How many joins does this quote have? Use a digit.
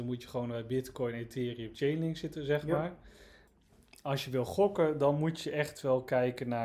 0